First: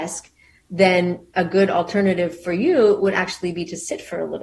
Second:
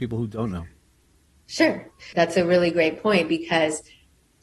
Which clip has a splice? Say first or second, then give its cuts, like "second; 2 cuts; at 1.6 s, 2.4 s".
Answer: second; 1 cut; at 2.1 s